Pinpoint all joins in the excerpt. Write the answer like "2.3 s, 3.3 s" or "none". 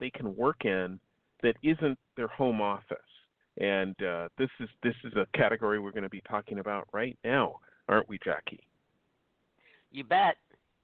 3.4 s